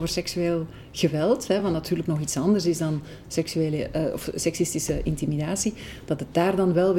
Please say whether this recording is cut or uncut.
uncut